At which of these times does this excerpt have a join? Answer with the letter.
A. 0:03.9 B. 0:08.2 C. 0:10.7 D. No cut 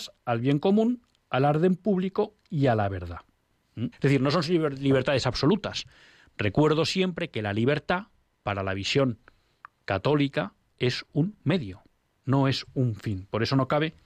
A